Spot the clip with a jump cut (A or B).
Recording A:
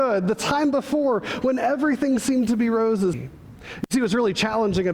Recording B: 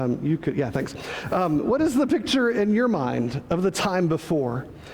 A